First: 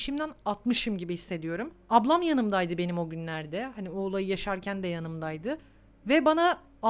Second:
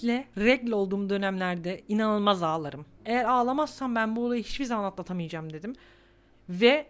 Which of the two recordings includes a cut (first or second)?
second